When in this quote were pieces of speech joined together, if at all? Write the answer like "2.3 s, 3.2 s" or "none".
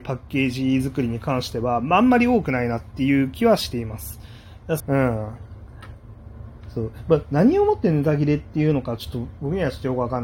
4.8 s